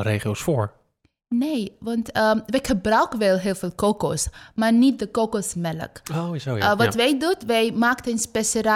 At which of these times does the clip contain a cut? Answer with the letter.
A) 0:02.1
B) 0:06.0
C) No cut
C